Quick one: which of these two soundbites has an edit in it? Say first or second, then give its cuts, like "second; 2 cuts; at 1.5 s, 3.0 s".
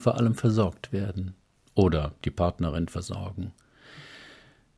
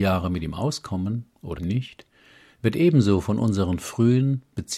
second; 1 cut; at 1.6 s